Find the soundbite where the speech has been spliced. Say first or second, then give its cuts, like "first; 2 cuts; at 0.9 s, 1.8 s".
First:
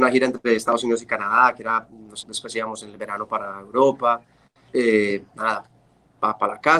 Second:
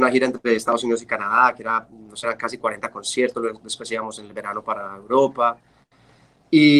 first; 2 cuts; at 2.2 s, 4.7 s